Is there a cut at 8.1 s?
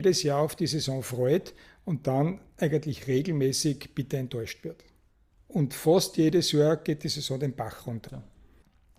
yes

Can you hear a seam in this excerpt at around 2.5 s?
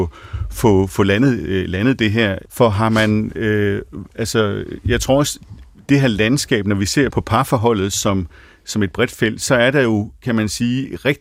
yes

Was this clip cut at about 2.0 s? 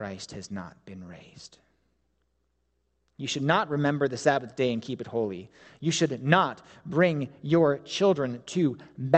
no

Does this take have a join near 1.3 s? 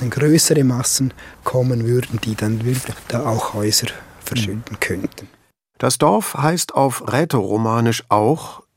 yes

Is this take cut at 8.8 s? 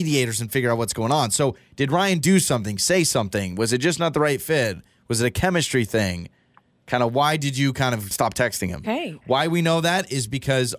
yes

